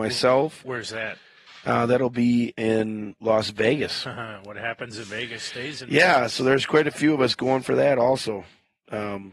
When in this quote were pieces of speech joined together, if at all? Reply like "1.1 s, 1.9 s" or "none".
none